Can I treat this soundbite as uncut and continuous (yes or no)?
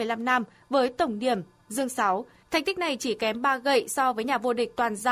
yes